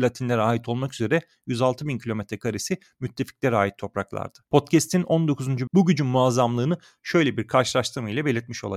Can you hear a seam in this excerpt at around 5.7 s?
yes; 2 cuts; at 4.5 s, 5.7 s

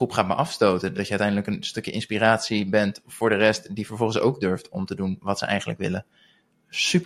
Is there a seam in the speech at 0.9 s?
no; 0 cuts

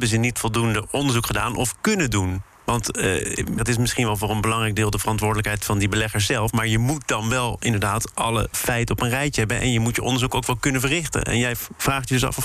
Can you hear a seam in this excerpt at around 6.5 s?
no; 1 cut; at 3.6 s

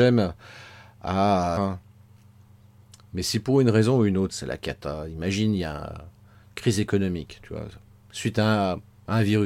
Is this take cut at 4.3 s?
yes; 2 cuts; at 1.6 s, 4.3 s

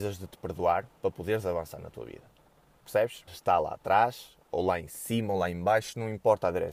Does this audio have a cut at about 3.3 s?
yes; 1 cut; at 3.3 s

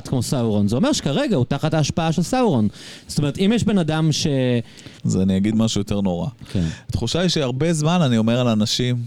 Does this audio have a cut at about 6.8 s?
no; 1 cut; at 5.0 s

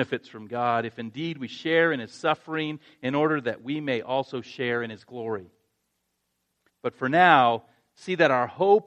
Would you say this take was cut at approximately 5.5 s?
no; 1 cut; at 6.7 s

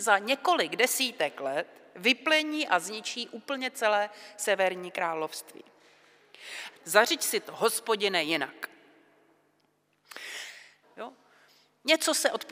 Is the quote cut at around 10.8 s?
yes; 2 cuts; at 6.8 s, 10.8 s

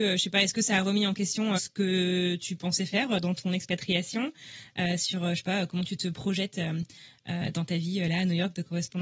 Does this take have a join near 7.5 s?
no; 1 cut; at 1.6 s

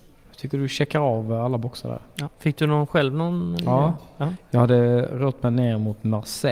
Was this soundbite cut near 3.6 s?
no; 0 cuts

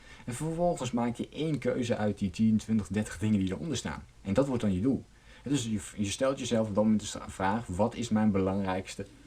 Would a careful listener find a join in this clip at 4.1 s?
yes; 1 cut; at 4.1 s

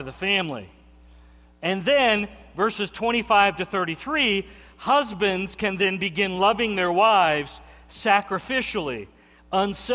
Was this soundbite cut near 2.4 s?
no; 0 cuts

